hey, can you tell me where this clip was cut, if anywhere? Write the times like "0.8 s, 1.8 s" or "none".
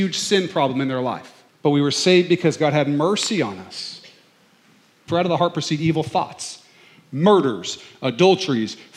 1.5 s, 5.1 s

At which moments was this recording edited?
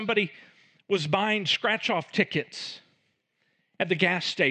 none

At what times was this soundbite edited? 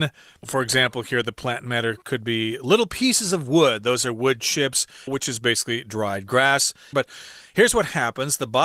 5.1 s, 6.9 s

